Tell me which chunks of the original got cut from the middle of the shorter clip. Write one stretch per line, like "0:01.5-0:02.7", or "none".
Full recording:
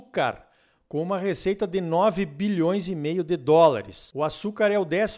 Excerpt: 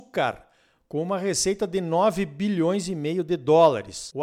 none